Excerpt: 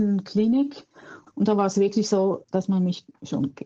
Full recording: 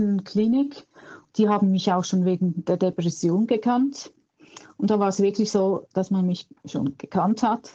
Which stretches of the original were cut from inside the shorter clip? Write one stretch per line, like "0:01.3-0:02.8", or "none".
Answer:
0:01.3-0:04.7